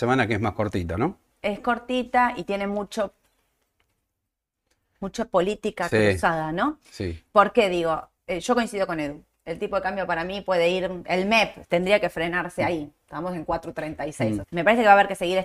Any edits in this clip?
yes; 2 cuts; at 11.6 s, 14.4 s

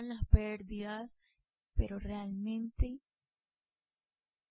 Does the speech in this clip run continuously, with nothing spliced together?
no; 1 cut; at 1.6 s

